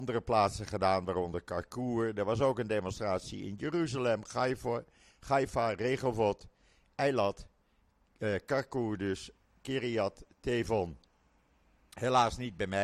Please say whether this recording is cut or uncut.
uncut